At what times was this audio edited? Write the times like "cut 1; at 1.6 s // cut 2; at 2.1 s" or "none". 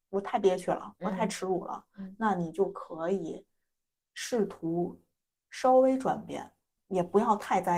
cut 1; at 6.8 s